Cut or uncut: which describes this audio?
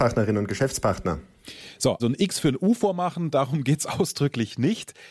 cut